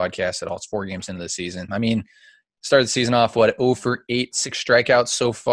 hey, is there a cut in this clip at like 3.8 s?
no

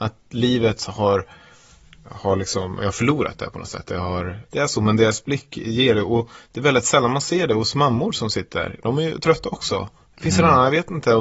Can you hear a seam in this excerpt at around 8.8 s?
no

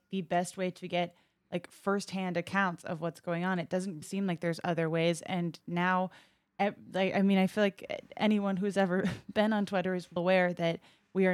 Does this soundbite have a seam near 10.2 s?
yes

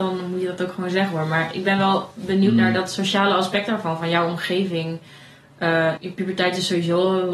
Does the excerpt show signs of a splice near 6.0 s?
yes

